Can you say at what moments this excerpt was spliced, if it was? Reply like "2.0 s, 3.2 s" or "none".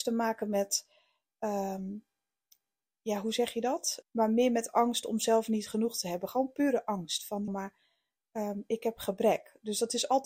4.0 s, 7.5 s